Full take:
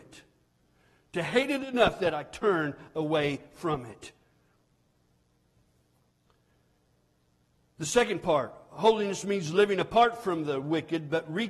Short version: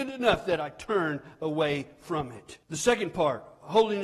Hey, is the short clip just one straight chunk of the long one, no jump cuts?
no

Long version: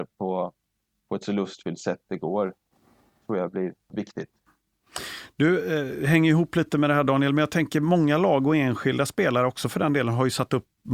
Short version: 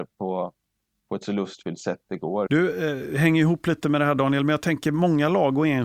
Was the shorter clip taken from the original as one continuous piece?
no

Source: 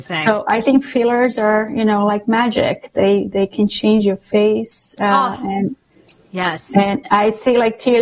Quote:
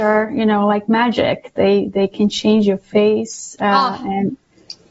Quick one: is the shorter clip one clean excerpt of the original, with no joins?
yes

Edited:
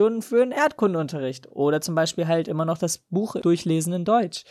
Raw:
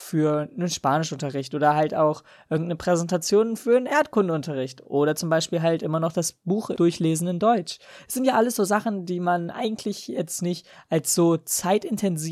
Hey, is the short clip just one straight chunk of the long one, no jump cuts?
yes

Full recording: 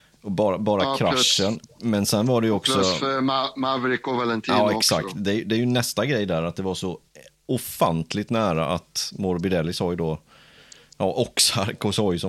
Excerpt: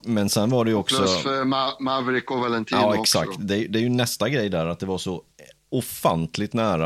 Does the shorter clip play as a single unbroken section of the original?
yes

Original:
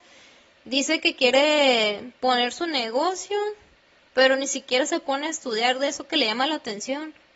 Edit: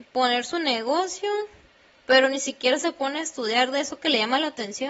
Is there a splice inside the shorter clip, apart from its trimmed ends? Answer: no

